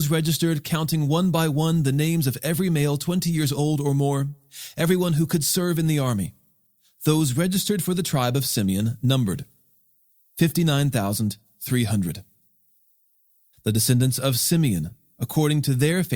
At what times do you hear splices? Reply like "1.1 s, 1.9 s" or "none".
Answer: 13.5 s